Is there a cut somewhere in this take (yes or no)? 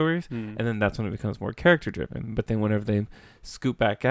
no